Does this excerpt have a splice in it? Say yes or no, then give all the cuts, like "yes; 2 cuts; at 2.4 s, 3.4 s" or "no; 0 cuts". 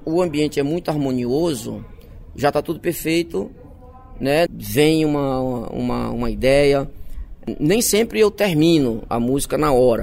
yes; 1 cut; at 4.5 s